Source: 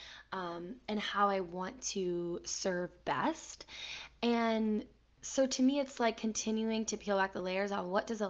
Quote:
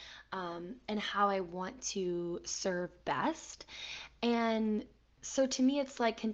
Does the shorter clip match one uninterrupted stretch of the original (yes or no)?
yes